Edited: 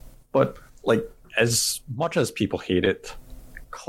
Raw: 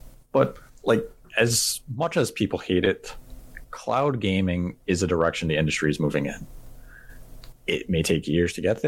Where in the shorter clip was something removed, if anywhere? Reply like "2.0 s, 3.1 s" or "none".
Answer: none

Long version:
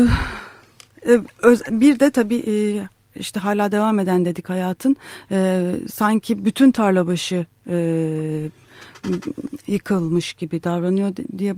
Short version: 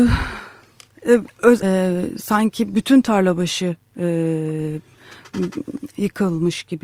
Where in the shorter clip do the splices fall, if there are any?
1.6 s

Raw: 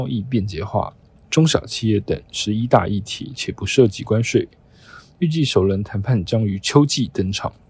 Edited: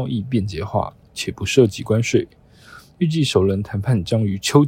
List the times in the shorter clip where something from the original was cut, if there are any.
1.1 s

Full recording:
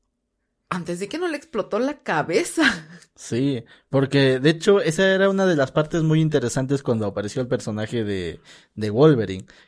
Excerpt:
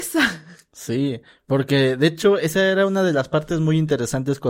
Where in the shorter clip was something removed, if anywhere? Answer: none

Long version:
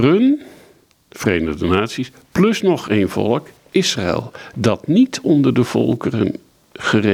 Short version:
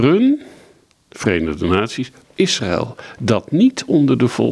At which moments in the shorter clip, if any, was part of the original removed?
2.2 s

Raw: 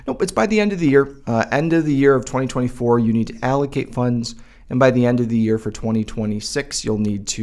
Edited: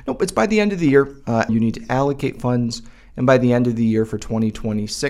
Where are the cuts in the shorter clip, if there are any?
1.5 s

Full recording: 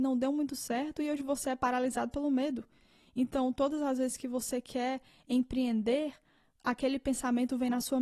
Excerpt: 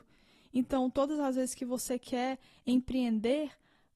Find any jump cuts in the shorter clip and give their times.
none

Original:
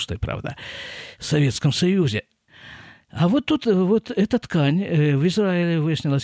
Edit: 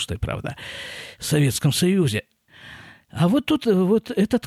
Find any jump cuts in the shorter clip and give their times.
none

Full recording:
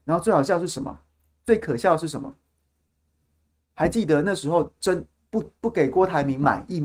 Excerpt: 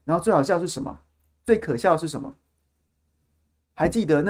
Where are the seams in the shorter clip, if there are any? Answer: none

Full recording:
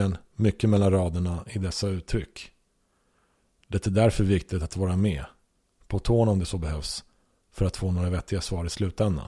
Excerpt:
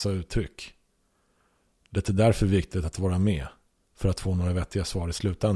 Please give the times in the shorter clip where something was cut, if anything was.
3.8 s

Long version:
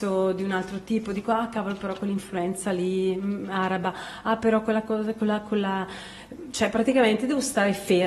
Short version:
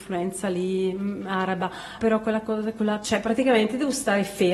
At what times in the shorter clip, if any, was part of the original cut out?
2.0 s, 3.0 s

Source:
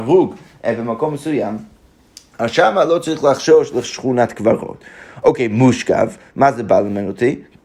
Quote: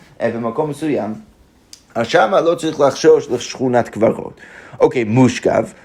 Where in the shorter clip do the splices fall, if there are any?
none

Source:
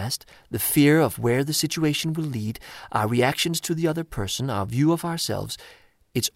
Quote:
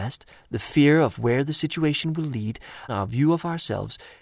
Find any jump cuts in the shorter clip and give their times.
2.9 s

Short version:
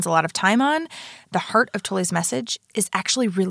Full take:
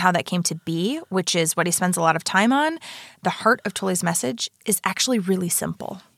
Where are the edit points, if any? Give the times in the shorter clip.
none

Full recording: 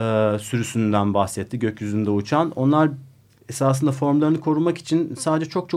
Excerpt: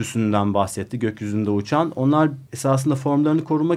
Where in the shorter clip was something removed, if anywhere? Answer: 2.5 s

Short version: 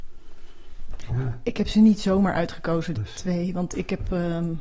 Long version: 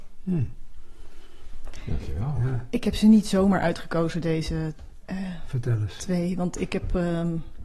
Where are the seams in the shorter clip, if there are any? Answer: 1.1 s, 2.9 s

